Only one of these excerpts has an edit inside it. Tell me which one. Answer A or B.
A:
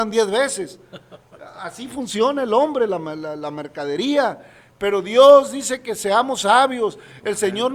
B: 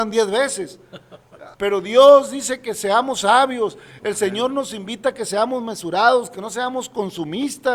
B